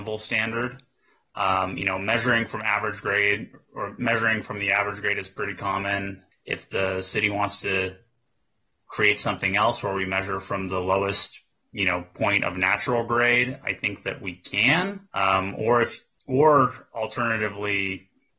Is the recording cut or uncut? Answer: cut